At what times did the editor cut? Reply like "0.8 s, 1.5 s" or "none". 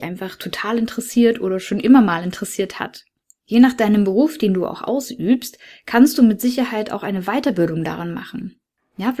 none